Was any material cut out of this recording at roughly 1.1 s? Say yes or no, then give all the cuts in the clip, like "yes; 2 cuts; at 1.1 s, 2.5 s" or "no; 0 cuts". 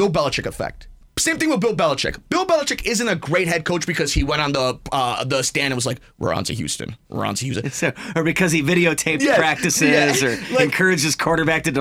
yes; 1 cut; at 1.1 s